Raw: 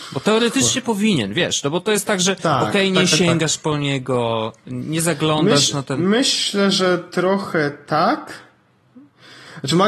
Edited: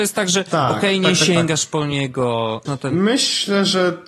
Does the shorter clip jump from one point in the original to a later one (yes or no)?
yes